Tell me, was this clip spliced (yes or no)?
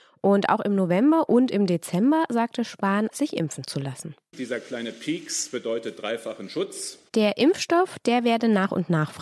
yes